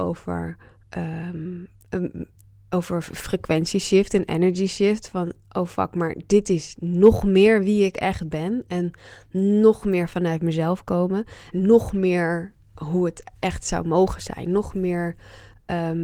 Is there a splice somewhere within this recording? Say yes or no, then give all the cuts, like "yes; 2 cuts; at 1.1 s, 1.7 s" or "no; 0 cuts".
yes; 1 cut; at 11.5 s